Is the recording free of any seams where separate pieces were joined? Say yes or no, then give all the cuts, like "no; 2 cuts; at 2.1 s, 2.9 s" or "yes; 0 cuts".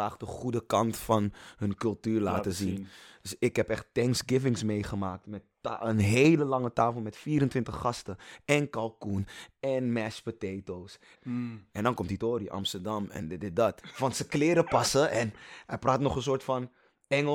no; 2 cuts; at 11.1 s, 13.8 s